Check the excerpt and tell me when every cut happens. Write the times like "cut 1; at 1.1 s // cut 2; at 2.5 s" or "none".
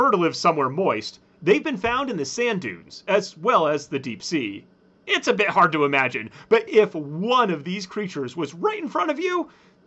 cut 1; at 5.0 s // cut 2; at 6.7 s